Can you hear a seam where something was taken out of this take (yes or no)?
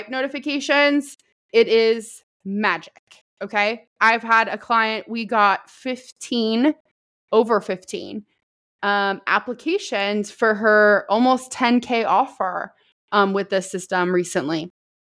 no